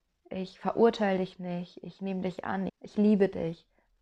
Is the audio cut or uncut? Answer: cut